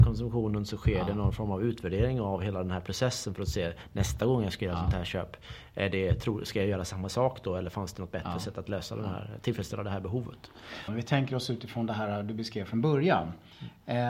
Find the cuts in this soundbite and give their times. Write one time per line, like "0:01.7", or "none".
0:10.9